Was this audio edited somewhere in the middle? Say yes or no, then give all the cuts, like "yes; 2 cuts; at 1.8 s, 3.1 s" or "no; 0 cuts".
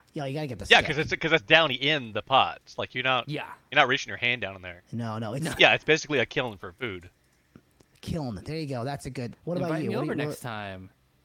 yes; 2 cuts; at 5.6 s, 9.3 s